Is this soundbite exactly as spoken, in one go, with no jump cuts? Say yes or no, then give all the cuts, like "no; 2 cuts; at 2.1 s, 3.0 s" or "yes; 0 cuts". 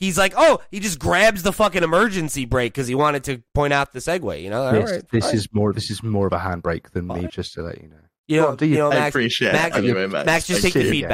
no; 1 cut; at 7.3 s